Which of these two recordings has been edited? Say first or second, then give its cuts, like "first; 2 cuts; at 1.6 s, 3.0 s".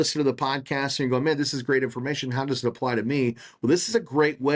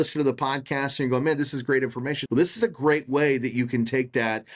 second; 1 cut; at 2.3 s